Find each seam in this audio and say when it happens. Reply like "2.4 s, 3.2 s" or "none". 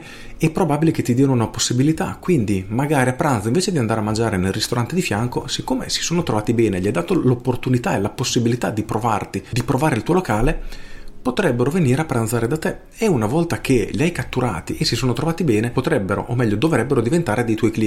none